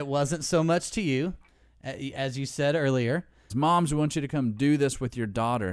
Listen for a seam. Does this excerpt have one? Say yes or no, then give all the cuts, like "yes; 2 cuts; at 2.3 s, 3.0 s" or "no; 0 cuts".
yes; 1 cut; at 3.5 s